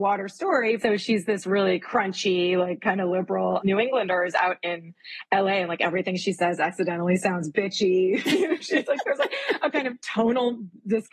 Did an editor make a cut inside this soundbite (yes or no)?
no